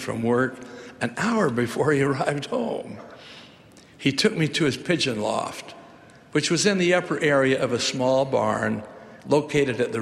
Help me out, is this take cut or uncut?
uncut